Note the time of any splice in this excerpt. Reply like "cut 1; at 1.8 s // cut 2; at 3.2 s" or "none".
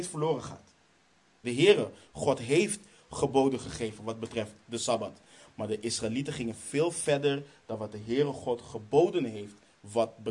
cut 1; at 1.4 s